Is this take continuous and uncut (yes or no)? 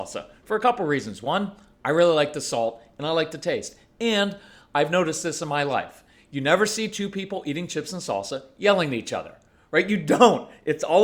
yes